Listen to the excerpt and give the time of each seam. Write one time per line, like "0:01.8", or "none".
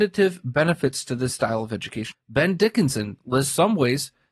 0:02.1